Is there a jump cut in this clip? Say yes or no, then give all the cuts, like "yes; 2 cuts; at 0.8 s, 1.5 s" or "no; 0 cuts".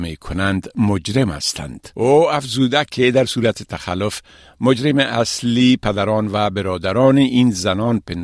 yes; 1 cut; at 1.9 s